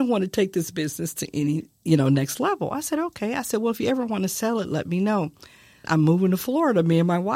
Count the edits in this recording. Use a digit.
1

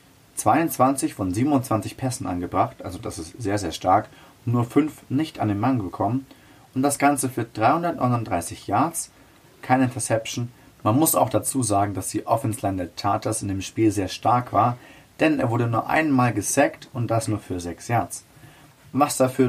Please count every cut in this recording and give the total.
1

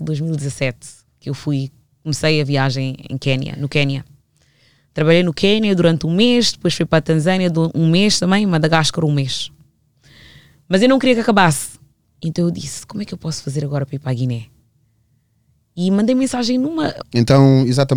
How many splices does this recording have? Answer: 1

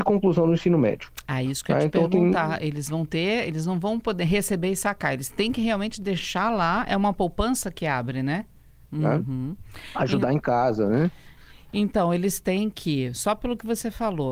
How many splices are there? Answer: 1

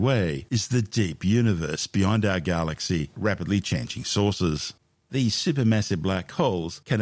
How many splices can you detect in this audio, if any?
2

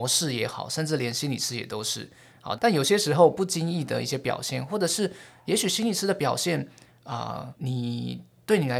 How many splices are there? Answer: 2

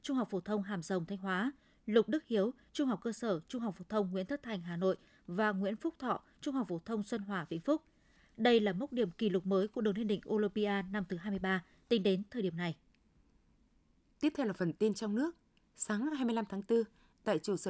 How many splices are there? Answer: 1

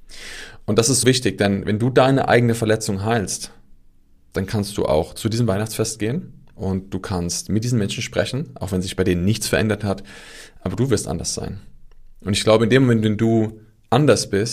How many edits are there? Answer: 1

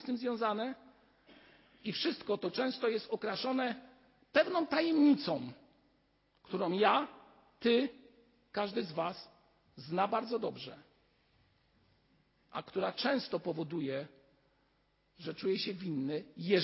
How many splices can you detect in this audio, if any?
0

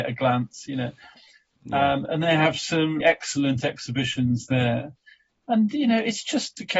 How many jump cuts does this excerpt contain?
1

